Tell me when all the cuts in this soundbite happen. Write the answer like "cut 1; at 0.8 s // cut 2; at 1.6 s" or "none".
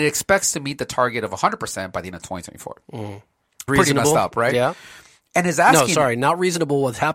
cut 1; at 3.7 s